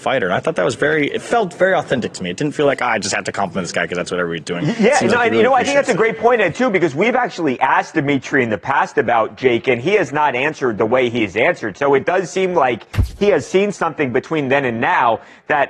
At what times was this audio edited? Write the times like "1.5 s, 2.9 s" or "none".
none